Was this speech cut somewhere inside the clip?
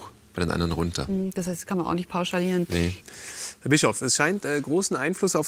no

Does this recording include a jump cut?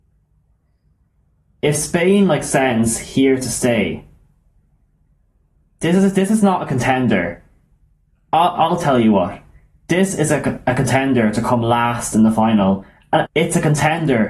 yes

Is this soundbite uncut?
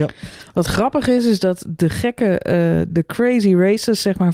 no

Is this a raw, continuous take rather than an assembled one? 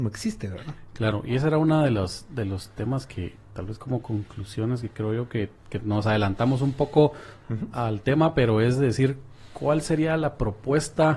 yes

